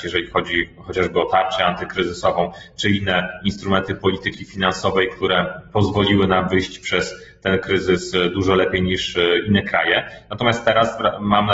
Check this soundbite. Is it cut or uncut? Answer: uncut